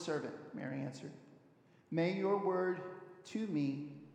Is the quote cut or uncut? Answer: uncut